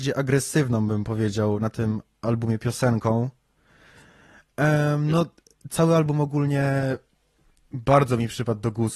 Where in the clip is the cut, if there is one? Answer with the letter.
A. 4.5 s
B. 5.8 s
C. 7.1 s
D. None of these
D